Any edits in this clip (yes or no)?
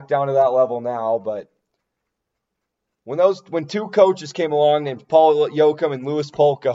no